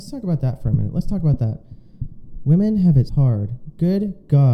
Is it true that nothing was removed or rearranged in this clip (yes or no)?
no